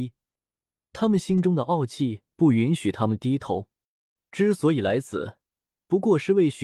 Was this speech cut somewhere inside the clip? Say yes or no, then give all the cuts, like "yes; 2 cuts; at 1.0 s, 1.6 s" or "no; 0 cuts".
no; 0 cuts